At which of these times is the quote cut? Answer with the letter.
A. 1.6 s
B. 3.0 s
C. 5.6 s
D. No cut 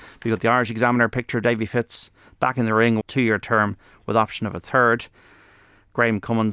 B